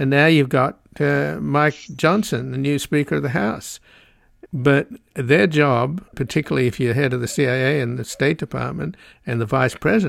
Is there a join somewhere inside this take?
yes; 1 cut; at 4.5 s

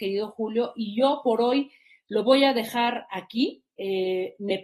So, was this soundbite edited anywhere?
no; 0 cuts

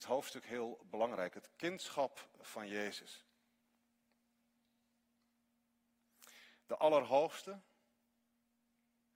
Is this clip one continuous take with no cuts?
yes; 0 cuts

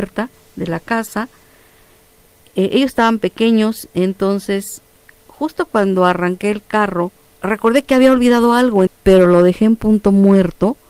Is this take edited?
yes; 2 cuts; at 7.3 s, 8.9 s

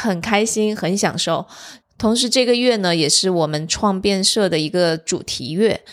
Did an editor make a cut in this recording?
yes; 1 cut; at 1.8 s

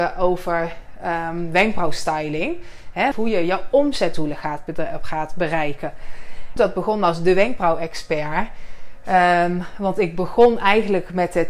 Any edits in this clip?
yes; 2 cuts; at 3.1 s, 6.6 s

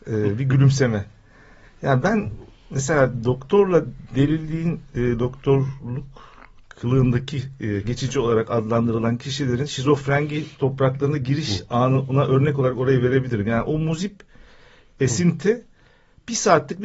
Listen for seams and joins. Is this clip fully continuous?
no; 1 cut; at 7.8 s

